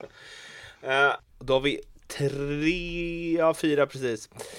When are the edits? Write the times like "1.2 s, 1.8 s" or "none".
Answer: 1.3 s